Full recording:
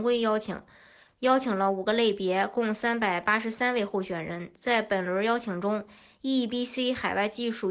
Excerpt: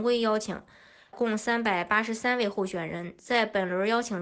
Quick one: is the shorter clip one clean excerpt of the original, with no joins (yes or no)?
no